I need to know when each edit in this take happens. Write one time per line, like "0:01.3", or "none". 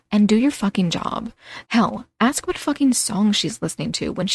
0:01.7